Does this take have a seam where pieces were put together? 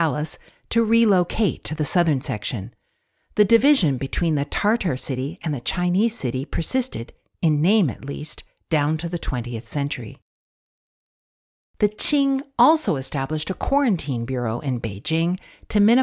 no; 0 cuts

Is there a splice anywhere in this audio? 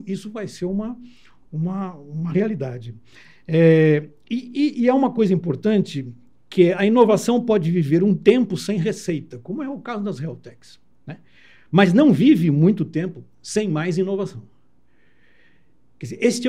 no; 0 cuts

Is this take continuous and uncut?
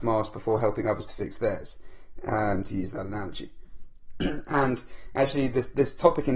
yes; 0 cuts

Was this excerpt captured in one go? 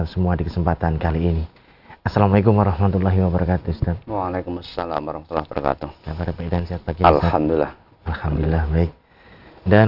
yes; 0 cuts

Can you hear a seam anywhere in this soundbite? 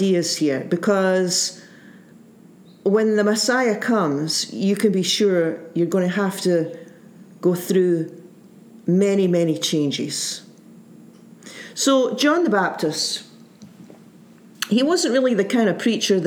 no; 0 cuts

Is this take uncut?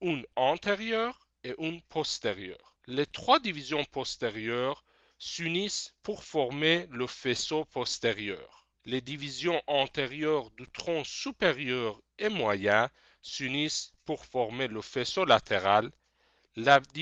no; 2 cuts; at 2.8 s, 8.7 s

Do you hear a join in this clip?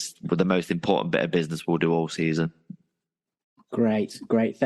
no; 0 cuts

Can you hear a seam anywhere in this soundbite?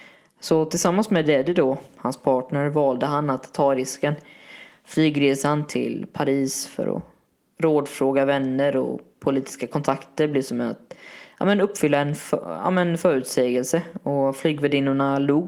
no; 0 cuts

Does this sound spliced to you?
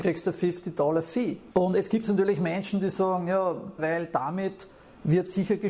yes; 2 cuts; at 1.5 s, 3.8 s

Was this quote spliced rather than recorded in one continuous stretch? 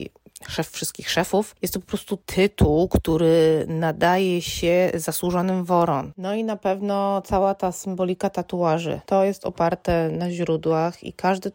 yes; 1 cut; at 6.1 s

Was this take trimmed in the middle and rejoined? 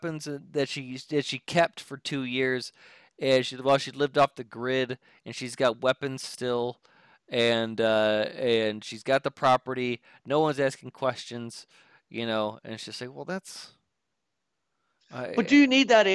no; 0 cuts

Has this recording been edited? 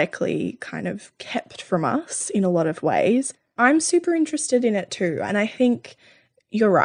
no; 0 cuts

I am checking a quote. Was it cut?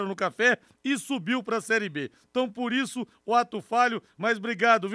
no; 0 cuts

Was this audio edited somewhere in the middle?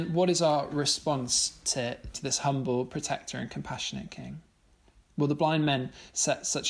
yes; 1 cut; at 2.1 s

